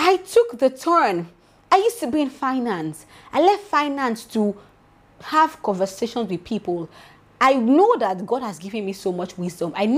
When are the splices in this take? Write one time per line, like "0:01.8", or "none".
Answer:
none